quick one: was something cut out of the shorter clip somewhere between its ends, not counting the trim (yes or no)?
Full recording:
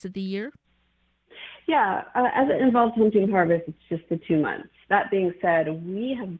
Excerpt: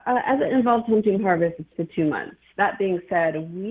yes